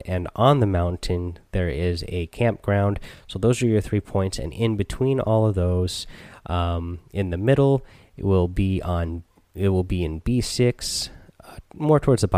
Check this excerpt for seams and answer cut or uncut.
uncut